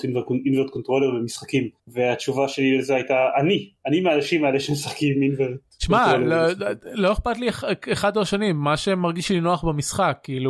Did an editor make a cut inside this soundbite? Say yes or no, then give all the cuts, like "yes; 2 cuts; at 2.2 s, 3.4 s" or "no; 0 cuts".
yes; 1 cut; at 1.8 s